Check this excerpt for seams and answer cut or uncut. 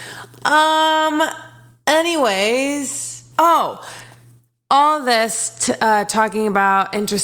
cut